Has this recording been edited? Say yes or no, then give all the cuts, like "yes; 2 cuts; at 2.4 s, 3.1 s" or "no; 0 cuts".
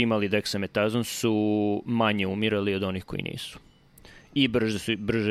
no; 0 cuts